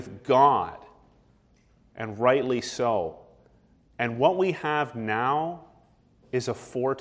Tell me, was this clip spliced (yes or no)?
no